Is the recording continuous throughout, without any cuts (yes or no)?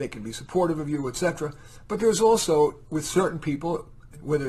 yes